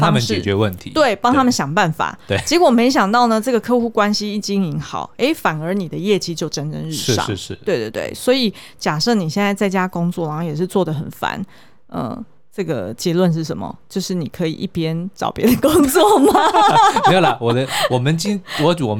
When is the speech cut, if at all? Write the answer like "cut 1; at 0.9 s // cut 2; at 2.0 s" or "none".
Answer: none